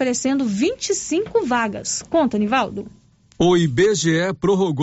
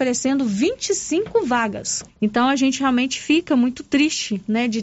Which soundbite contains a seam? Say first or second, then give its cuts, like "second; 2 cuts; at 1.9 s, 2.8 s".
second; 1 cut; at 2.1 s